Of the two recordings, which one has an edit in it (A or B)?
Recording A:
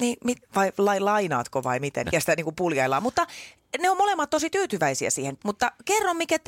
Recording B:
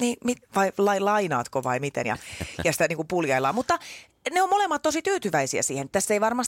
A